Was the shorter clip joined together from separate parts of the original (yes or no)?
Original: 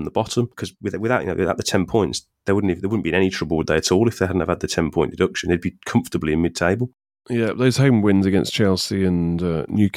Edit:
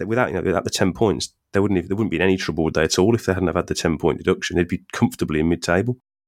no